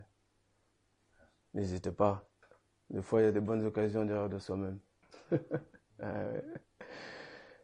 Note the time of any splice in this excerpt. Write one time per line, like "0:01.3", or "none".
none